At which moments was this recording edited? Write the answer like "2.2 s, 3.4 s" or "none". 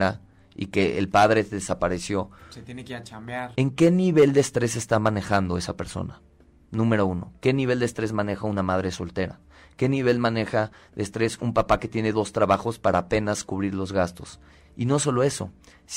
3.5 s